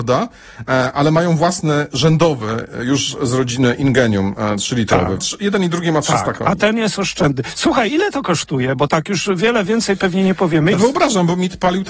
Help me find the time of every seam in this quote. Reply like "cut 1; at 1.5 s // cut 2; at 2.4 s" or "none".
cut 1; at 5.2 s // cut 2; at 10.7 s